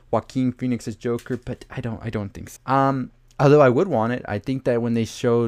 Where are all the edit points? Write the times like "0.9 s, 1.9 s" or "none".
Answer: 2.6 s

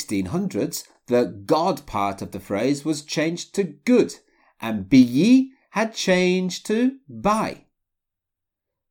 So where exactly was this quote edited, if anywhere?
none

